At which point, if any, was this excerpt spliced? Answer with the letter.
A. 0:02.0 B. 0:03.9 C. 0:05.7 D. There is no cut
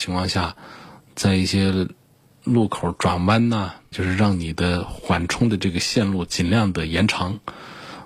B